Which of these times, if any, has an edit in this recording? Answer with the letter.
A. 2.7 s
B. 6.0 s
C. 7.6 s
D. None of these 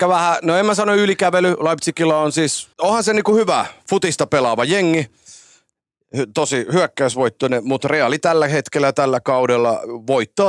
A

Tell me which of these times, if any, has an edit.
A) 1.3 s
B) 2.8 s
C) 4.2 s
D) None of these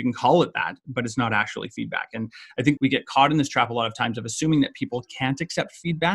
B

